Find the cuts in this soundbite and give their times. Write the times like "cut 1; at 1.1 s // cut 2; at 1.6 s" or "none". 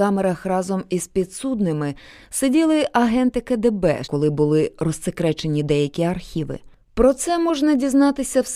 cut 1; at 4.0 s